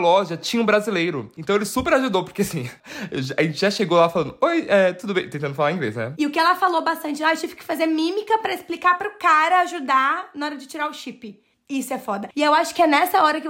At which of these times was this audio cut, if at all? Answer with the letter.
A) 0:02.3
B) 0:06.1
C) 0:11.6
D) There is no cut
B